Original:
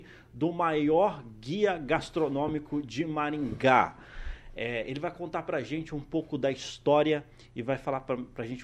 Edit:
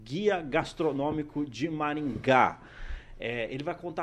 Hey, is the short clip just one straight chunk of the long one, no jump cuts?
yes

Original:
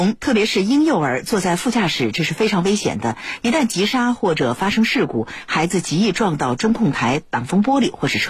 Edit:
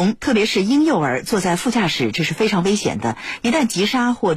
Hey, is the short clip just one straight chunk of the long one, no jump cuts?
yes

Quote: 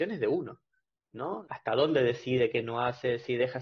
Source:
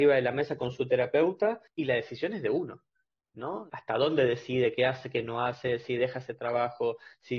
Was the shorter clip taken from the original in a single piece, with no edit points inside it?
no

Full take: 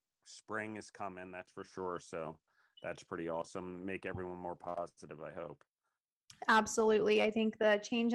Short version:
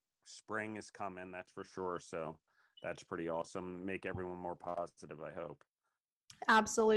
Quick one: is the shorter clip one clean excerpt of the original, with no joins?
yes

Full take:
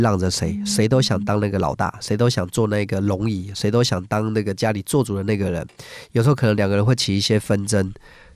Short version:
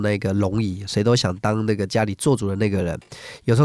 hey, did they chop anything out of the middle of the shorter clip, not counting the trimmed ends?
no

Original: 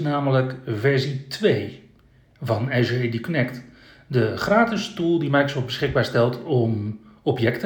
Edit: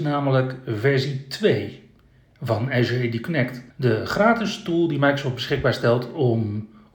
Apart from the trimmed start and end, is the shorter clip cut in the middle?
yes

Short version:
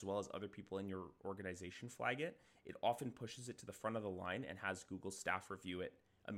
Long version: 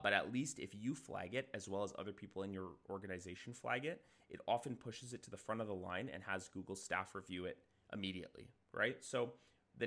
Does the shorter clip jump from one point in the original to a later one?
no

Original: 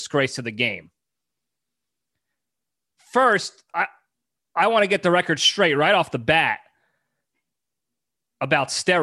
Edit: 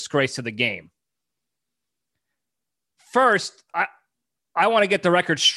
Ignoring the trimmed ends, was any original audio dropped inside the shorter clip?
no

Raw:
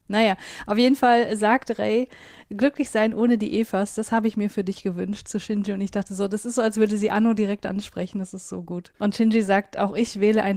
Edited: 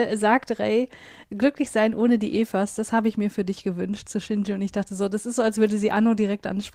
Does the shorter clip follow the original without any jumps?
yes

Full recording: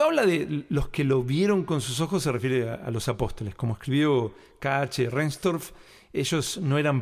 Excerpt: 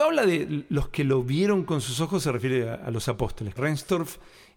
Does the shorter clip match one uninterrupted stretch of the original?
no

